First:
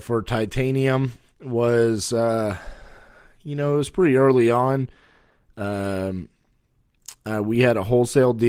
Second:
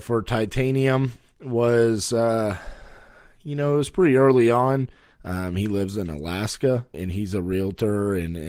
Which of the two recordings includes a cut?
second; 2 cuts; at 5.1 s, 6.9 s

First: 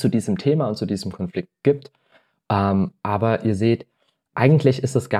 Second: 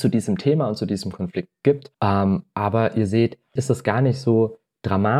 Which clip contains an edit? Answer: second; 2 cuts; at 1.9 s, 3.6 s

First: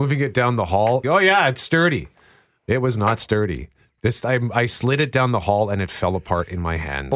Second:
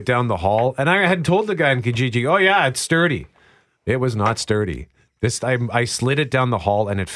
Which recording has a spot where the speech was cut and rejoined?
first; 1 cut; at 1.0 s

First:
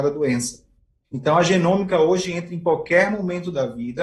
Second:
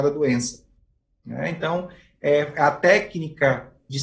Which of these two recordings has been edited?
first; 1 cut; at 1.0 s

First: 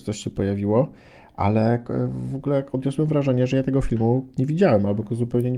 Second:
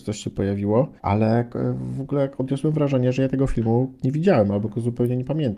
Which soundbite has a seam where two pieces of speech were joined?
second; 1 cut; at 1.0 s

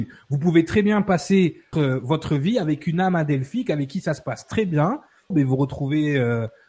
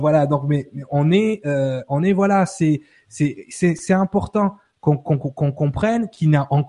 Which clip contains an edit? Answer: first; 2 cuts; at 1.7 s, 5.3 s

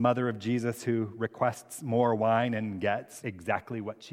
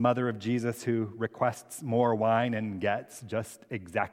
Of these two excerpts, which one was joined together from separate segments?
first; 1 cut; at 3.2 s

